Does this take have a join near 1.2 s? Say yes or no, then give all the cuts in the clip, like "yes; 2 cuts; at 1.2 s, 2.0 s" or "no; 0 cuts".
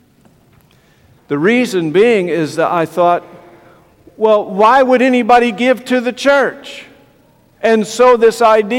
yes; 2 cuts; at 1.2 s, 7.5 s